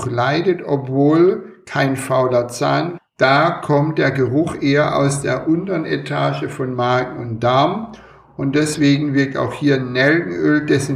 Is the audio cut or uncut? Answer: cut